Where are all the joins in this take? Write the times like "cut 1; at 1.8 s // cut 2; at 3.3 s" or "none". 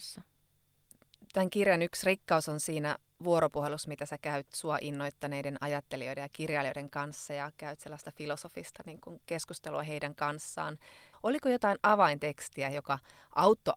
none